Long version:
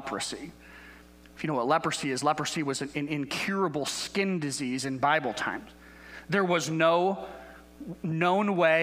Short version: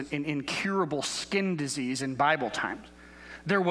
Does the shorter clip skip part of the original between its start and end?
no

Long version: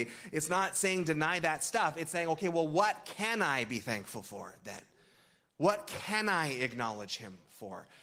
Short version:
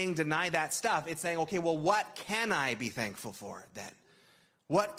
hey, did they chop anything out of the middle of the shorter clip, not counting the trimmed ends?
no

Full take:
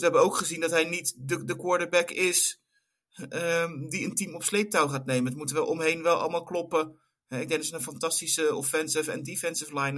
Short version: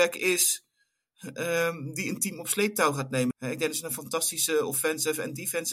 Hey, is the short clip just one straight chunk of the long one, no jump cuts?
no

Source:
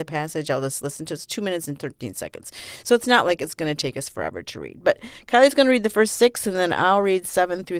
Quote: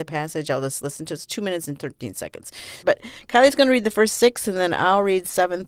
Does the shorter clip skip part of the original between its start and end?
yes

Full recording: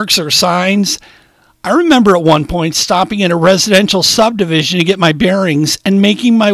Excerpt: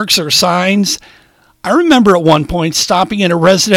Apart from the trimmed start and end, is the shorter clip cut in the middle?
no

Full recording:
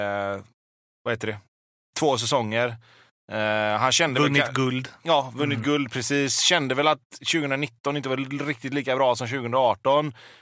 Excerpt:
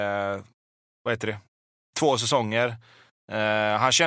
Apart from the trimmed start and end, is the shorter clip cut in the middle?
no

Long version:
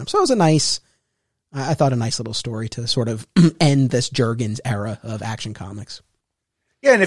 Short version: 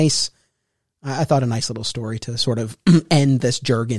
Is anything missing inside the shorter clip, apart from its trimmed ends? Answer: no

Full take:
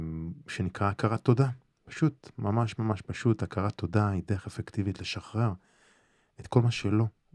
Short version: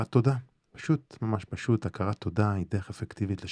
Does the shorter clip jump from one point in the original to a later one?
yes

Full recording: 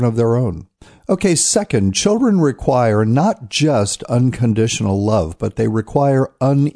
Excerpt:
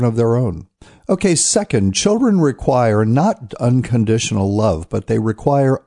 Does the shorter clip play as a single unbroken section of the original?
no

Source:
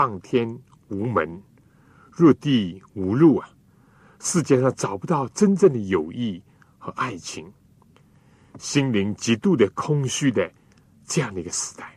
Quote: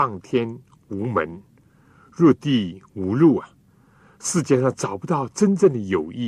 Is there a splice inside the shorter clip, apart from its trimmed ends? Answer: no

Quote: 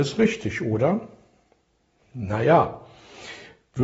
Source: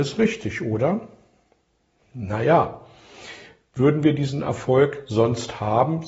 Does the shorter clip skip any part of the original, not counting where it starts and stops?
no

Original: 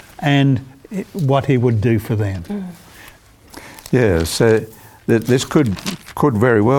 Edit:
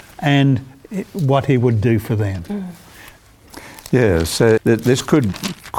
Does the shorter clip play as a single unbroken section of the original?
no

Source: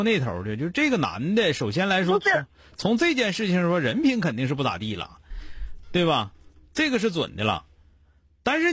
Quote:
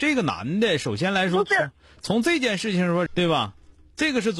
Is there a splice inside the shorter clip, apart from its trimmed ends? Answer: yes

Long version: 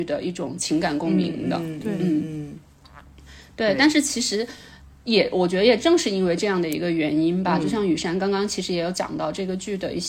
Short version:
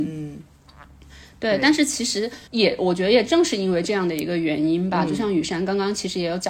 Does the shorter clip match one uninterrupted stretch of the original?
no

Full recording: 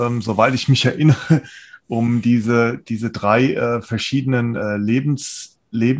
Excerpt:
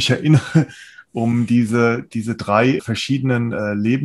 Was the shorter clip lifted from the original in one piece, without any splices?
no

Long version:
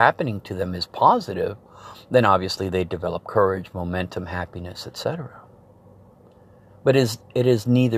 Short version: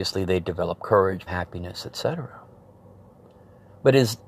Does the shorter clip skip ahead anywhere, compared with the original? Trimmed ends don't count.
yes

